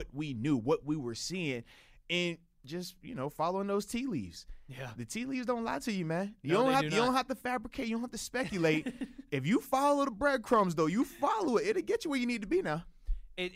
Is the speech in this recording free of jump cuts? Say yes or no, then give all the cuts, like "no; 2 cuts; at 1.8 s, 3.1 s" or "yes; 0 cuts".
yes; 0 cuts